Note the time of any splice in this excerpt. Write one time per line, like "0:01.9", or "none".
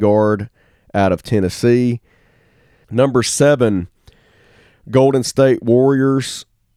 0:02.8